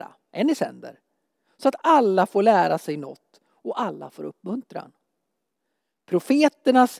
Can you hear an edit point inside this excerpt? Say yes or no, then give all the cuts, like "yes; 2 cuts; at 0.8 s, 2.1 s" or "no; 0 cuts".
no; 0 cuts